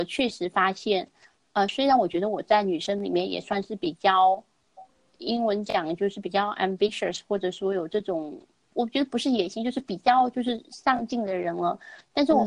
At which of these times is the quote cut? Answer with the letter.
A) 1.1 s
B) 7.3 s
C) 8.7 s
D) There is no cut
C